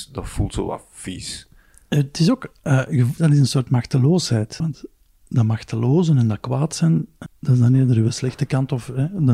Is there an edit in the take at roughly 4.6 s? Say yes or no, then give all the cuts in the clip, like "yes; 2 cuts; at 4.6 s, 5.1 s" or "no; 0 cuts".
yes; 3 cuts; at 3.2 s, 4.6 s, 7.3 s